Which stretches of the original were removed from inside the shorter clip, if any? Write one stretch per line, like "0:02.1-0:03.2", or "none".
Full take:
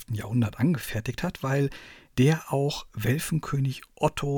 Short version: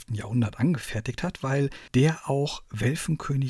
0:01.9-0:02.1